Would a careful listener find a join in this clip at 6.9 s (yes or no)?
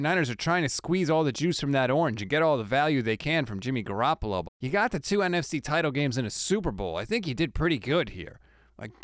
no